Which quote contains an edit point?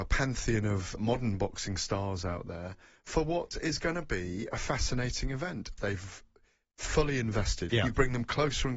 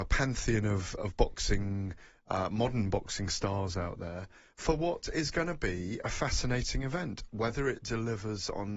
first; 3 cuts; at 1.0 s, 5.8 s, 7.7 s

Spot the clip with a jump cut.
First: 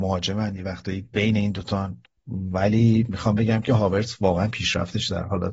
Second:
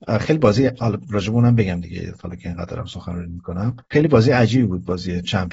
second; 1 cut; at 3.8 s

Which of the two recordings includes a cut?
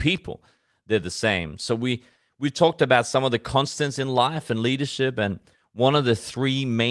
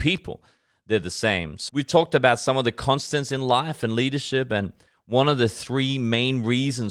second; 1 cut; at 1.7 s

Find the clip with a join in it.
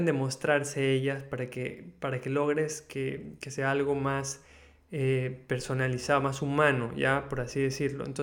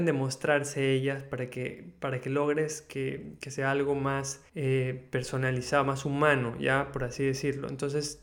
second; 1 cut; at 4.5 s

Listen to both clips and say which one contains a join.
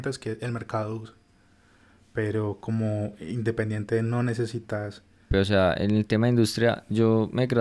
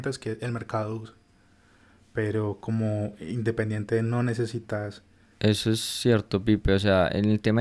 first; 1 cut; at 5.3 s

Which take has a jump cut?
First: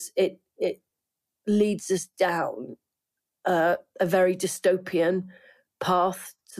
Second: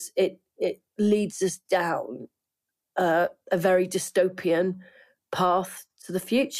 second; 1 cut; at 0.9 s

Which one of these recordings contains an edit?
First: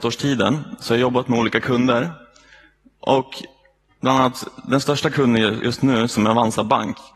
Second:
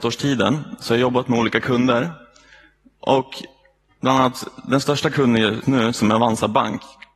second; 1 cut; at 5.6 s

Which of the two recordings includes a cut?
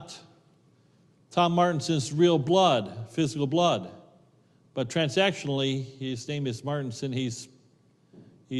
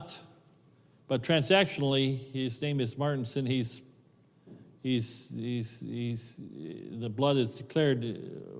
second; 1 cut; at 1.0 s

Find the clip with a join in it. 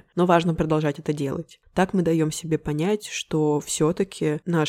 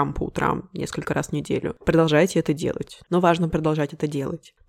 second; 1 cut; at 3.0 s

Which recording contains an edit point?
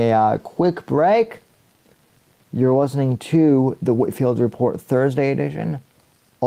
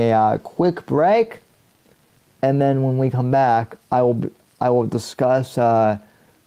first; 1 cut; at 2.3 s

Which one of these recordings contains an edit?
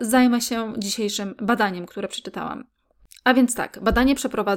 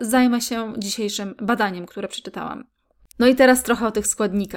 second; 1 cut; at 3.1 s

